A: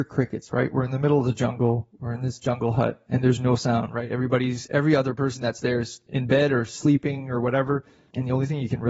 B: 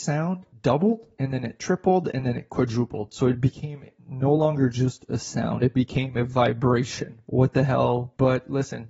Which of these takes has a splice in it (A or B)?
B